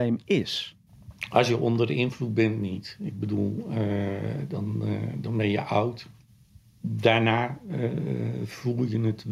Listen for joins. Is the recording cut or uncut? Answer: uncut